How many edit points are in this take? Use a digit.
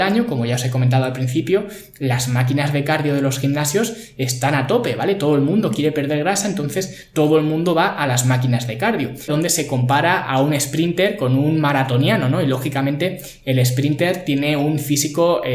1